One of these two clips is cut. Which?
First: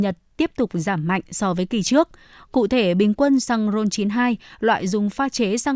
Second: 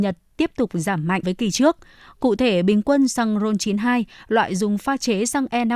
second; 1 cut; at 1.2 s

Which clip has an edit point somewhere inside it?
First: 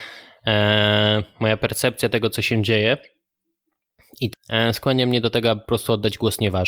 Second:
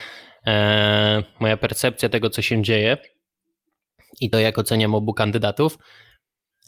first; 1 cut; at 4.3 s

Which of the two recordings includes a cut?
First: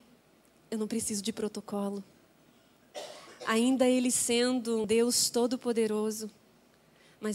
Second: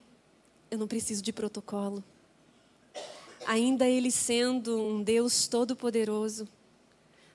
first; 1 cut; at 4.8 s

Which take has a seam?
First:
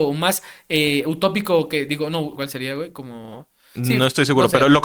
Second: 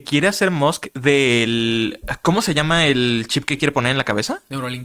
first; 1 cut; at 2.4 s

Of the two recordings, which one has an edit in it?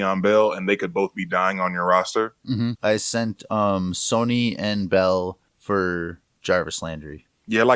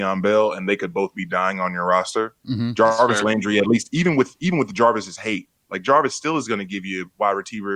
first; 1 cut; at 2.7 s

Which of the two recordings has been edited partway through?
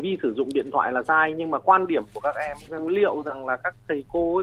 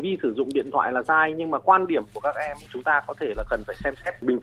first; 1 cut; at 2.7 s

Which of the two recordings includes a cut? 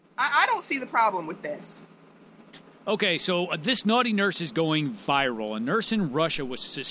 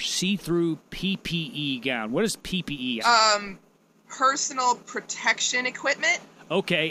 second; 1 cut; at 3.0 s

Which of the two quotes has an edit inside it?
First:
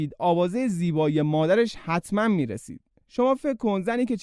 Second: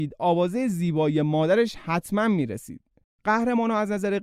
second; 1 cut; at 3.0 s

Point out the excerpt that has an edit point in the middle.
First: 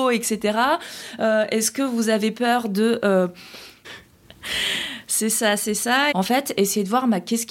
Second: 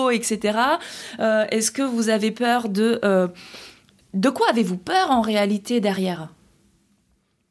first; 2 cuts; at 3.8 s, 6.1 s

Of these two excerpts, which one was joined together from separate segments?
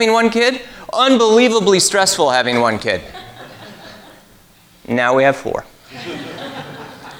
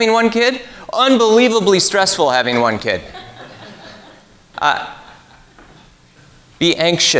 second; 1 cut; at 4.5 s

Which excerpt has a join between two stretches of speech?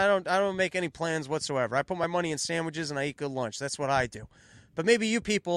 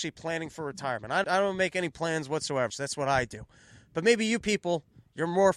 second; 2 cuts; at 1.2 s, 2.7 s

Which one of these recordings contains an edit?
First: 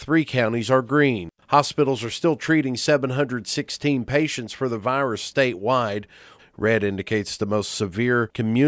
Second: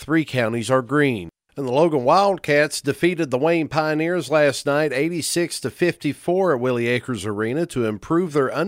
first; 2 cuts; at 1.4 s, 6.4 s

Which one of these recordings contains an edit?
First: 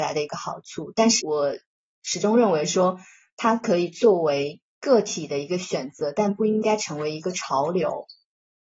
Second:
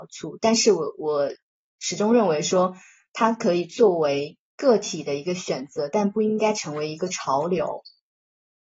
first; 1 cut; at 1.2 s

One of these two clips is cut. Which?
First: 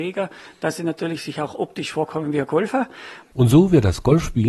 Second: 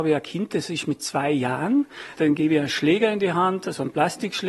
first; 1 cut; at 3.2 s

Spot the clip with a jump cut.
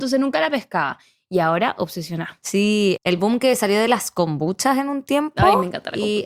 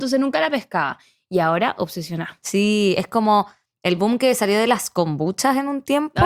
first; 1 cut; at 3.0 s

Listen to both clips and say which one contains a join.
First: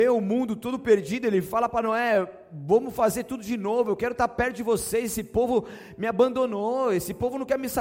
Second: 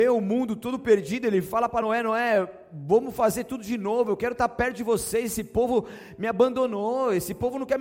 first; 1 cut; at 1.8 s

